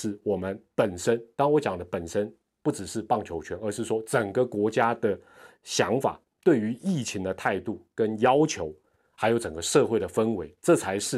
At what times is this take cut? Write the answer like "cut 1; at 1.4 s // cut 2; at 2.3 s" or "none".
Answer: none

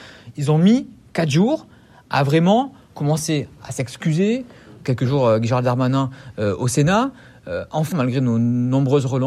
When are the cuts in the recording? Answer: cut 1; at 7.9 s

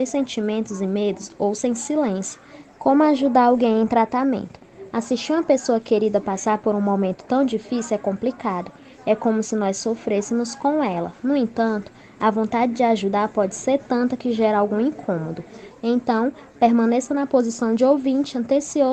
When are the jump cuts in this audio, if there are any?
cut 1; at 2.7 s // cut 2; at 15.7 s

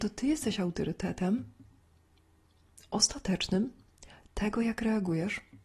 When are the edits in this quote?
none

